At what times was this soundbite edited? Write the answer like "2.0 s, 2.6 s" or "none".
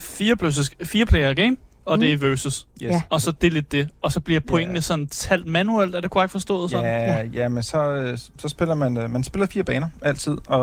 none